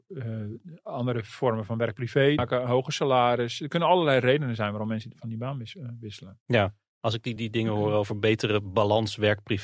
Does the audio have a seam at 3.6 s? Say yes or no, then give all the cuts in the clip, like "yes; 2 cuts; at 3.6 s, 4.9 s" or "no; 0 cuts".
no; 2 cuts; at 2.4 s, 7.4 s